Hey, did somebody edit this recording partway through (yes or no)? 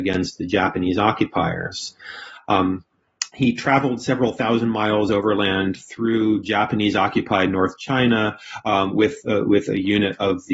yes